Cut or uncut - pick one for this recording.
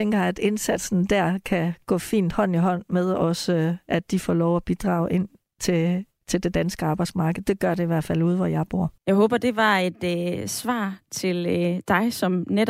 cut